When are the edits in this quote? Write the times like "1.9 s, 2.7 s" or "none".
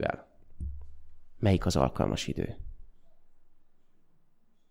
none